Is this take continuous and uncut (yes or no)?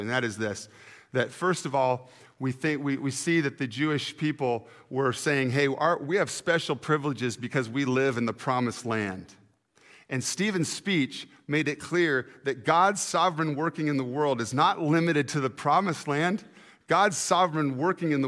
yes